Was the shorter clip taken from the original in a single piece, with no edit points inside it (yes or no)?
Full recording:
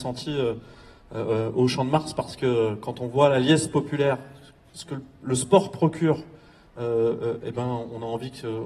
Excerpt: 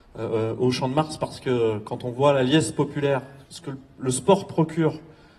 no